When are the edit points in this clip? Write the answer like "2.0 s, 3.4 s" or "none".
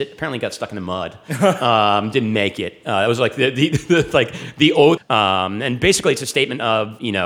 5.0 s

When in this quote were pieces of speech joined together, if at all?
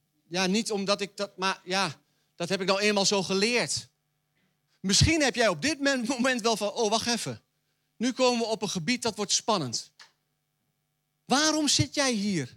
4.7 s

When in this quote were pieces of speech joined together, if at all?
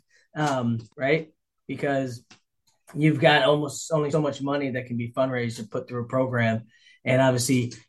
0.9 s, 4.1 s

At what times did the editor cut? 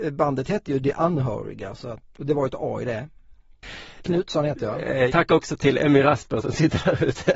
2.1 s, 4.0 s, 5.1 s

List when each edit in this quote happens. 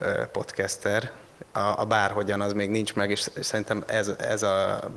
none

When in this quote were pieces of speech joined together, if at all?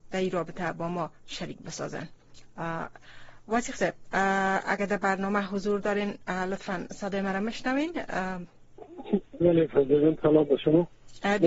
9.4 s

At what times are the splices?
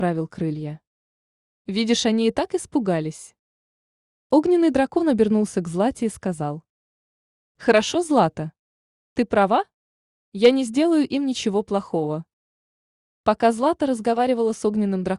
1.5 s

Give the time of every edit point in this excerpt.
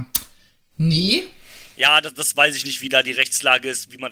none

